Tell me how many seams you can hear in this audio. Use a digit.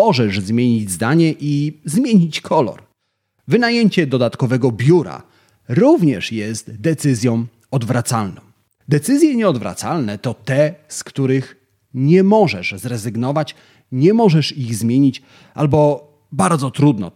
0